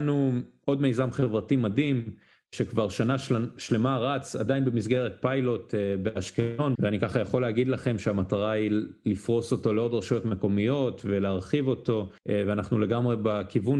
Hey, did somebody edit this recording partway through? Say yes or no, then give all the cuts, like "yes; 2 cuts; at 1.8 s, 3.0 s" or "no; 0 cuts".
yes; 2 cuts; at 6.8 s, 12.2 s